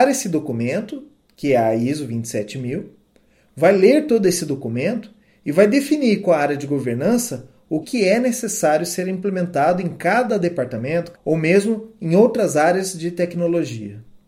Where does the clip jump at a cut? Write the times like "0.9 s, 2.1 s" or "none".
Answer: 7.8 s, 11.1 s

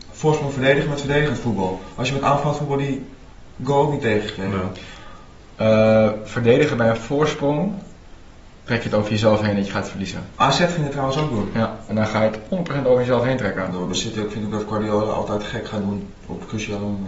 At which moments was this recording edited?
11.9 s

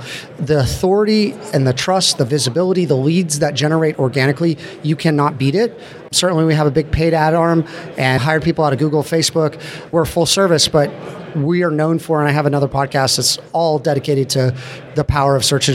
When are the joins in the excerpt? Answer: none

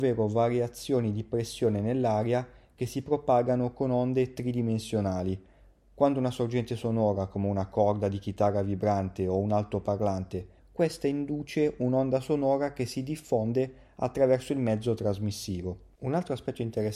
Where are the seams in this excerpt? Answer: 10.6 s, 15.9 s

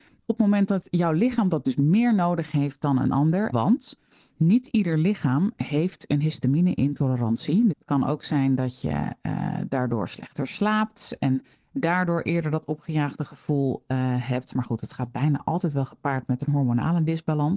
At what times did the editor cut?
3.5 s, 7.7 s

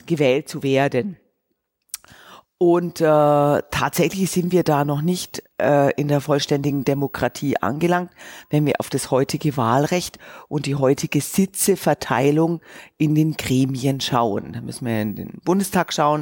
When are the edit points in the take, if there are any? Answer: 5.5 s

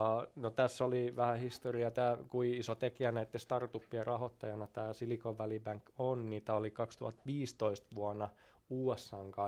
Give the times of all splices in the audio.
none

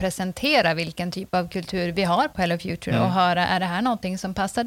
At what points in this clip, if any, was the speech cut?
none

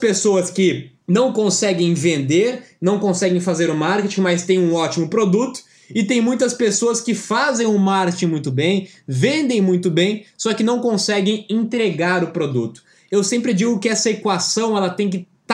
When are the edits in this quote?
1.0 s

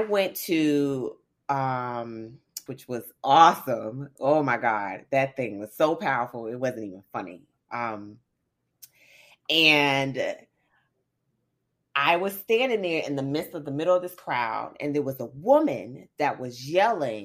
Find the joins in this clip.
2.7 s

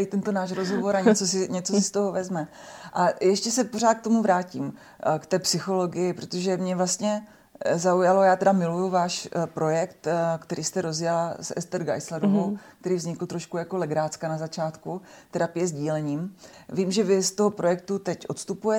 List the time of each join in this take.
16.5 s

